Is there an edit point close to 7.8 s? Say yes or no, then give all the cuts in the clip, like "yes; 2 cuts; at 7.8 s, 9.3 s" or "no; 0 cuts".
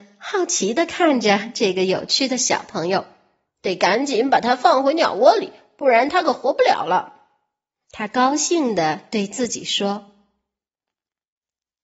yes; 2 cuts; at 3.4 s, 7.8 s